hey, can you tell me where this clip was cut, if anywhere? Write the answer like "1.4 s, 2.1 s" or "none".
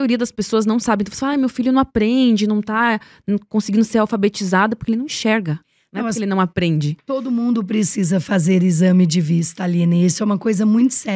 none